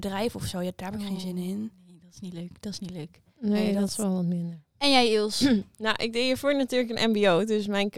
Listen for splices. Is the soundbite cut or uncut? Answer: uncut